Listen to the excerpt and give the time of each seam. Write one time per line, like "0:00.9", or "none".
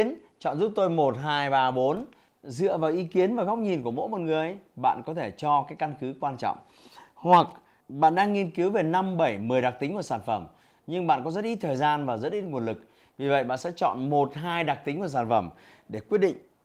none